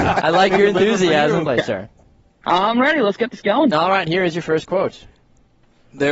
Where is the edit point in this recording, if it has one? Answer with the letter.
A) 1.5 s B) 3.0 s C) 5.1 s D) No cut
A